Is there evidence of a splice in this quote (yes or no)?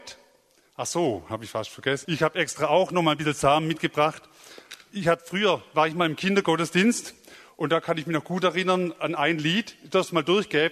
yes